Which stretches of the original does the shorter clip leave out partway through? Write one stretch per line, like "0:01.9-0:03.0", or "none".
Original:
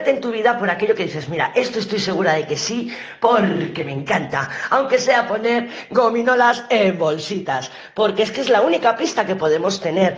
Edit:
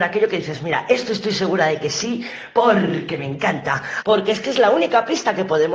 0:04.7-0:07.9